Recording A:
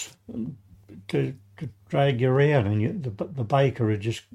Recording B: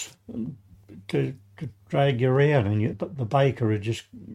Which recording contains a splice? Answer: B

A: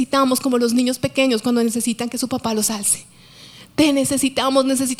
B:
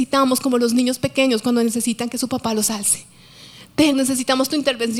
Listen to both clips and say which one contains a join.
B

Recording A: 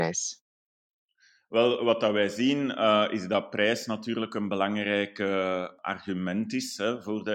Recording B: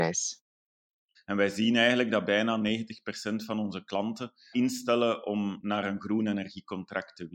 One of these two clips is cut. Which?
B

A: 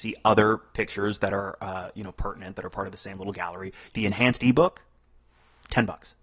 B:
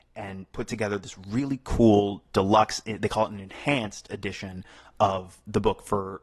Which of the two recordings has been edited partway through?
A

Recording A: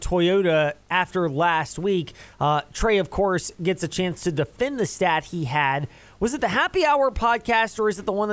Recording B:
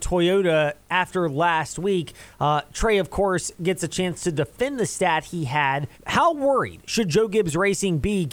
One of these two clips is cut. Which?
B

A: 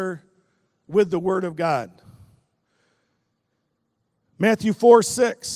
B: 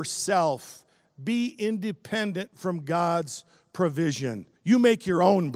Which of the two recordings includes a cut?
B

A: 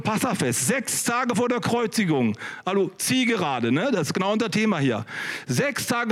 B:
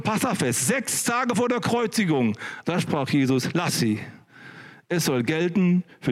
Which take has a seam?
B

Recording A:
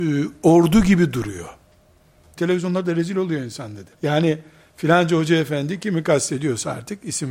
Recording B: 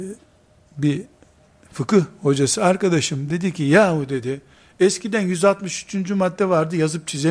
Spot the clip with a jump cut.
A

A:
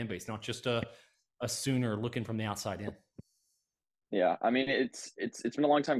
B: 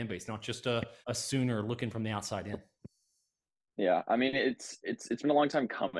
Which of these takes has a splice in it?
B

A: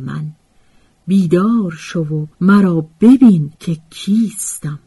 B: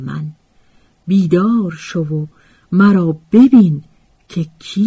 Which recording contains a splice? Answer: A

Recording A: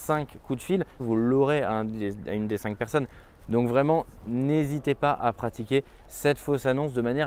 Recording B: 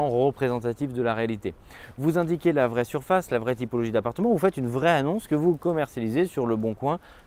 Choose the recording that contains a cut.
A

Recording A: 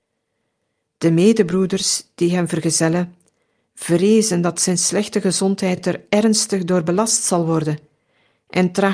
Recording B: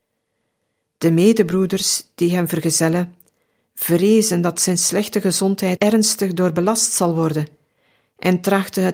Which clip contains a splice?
B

